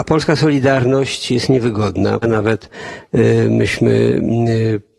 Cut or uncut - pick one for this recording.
cut